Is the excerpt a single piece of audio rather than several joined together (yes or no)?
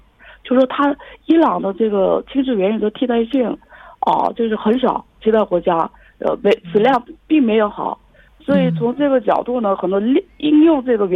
yes